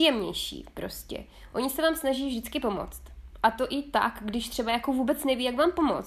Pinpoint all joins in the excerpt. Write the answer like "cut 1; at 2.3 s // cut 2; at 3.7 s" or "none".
none